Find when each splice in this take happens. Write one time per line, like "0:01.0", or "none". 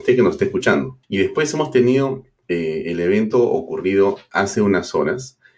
0:01.0

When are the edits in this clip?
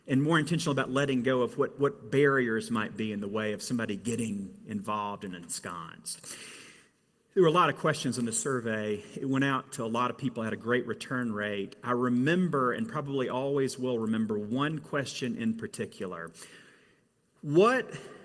none

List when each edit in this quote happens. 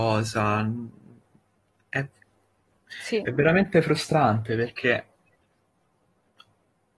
none

